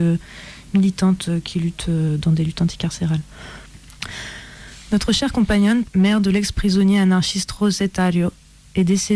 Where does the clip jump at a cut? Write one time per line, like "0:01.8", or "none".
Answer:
0:03.6
0:05.8